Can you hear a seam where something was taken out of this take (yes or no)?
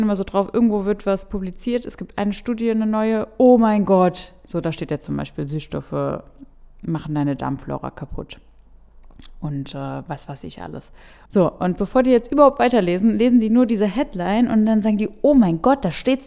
yes